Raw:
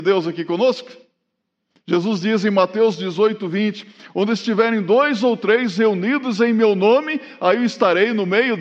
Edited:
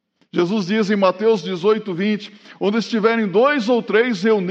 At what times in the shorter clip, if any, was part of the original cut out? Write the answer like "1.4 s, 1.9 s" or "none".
none